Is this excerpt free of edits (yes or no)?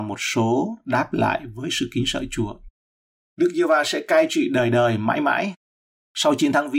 yes